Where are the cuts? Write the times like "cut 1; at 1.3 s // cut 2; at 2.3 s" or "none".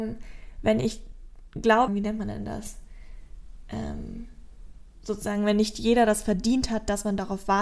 cut 1; at 1.9 s